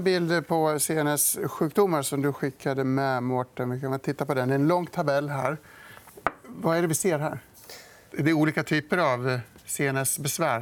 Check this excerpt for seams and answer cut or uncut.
uncut